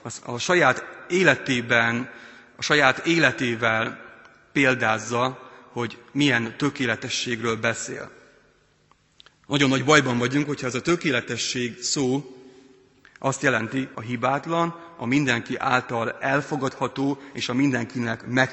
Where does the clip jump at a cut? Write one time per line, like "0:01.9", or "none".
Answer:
0:09.3
0:13.9